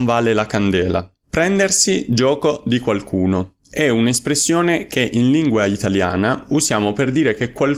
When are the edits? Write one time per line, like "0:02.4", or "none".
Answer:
0:01.2